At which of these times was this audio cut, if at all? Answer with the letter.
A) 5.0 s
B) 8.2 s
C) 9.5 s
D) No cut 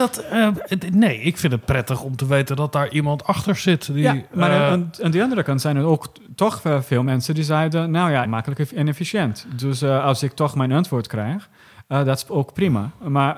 B